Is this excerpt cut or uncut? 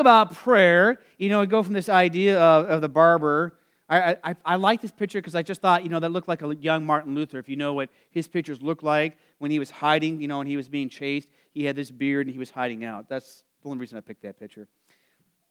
uncut